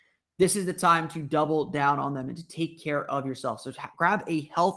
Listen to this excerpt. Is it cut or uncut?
uncut